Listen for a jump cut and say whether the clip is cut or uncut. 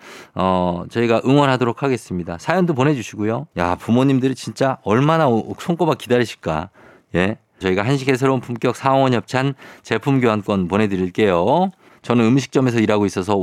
cut